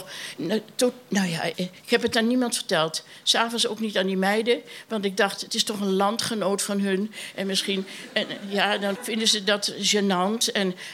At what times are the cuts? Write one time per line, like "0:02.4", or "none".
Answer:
0:01.5
0:09.0